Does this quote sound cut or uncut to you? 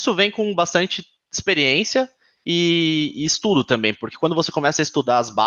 uncut